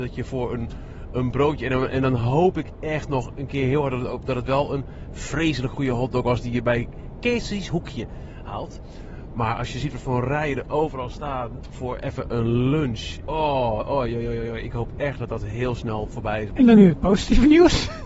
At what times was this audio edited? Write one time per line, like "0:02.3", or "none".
0:13.2
0:16.5